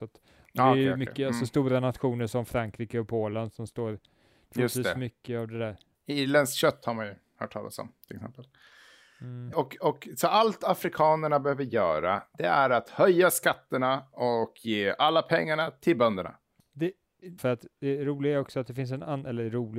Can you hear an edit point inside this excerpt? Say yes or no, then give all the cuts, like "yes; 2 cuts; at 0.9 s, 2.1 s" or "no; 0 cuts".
yes; 2 cuts; at 9.5 s, 17.4 s